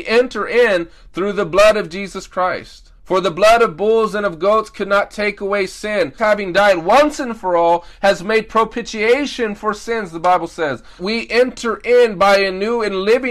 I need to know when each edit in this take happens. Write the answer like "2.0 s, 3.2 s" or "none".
2.9 s, 6.2 s, 11.0 s